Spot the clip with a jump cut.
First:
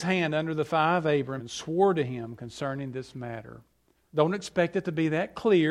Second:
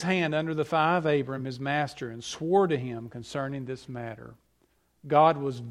first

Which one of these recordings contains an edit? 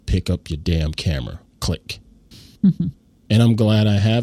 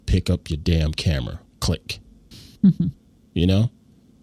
first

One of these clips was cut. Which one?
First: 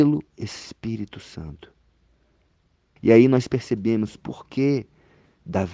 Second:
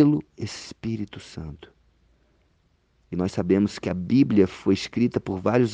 first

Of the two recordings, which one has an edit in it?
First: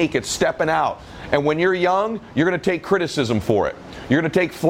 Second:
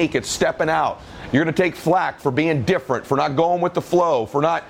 second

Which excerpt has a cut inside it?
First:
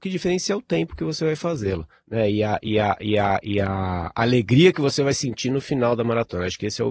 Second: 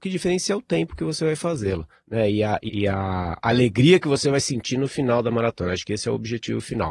second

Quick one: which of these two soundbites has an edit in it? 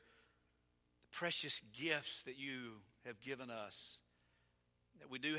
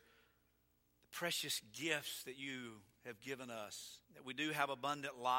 second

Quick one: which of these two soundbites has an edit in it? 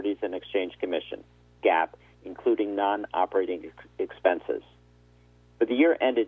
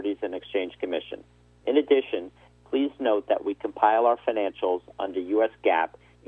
first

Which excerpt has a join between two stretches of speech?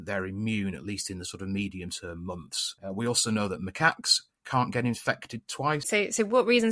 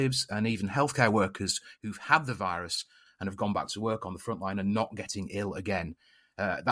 first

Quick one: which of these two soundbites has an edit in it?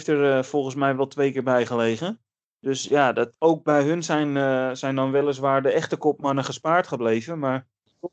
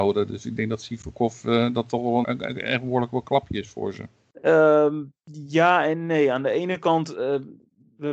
second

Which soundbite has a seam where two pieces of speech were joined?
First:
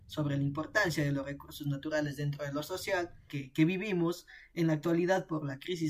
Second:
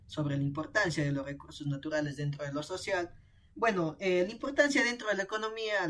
first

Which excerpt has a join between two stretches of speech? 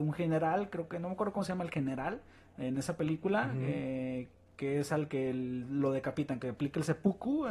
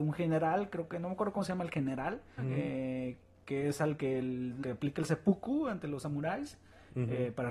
second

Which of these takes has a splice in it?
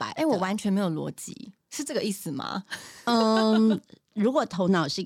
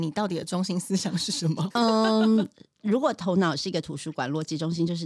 second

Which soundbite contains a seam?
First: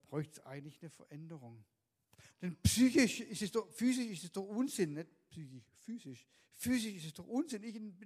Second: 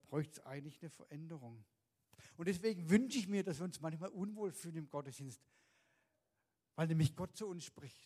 first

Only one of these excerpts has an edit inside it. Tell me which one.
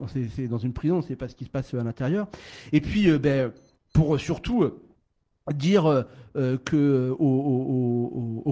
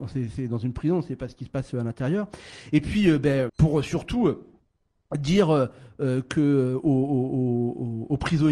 second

